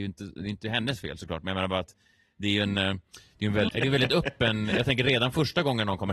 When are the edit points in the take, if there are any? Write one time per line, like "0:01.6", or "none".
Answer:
0:03.7